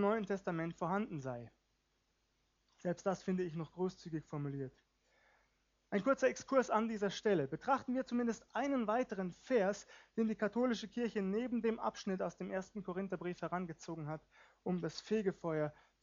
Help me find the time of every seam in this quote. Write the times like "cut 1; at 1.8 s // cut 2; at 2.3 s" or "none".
none